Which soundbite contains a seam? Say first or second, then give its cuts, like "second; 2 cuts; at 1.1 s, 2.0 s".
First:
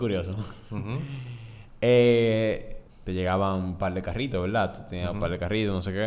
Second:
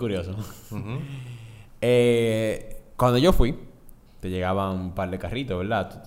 first; 1 cut; at 2.9 s